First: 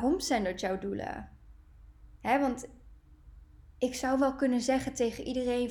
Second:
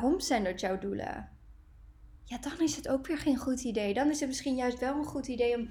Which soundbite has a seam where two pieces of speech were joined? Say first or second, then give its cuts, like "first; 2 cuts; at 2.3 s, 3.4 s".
second; 1 cut; at 2.2 s